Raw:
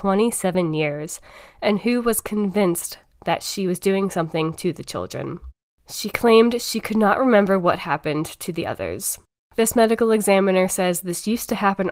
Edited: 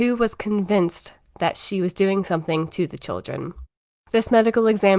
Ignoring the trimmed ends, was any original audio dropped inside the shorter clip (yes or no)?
yes